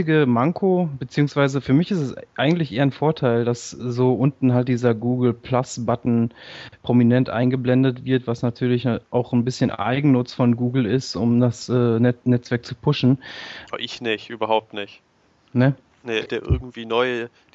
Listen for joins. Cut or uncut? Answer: cut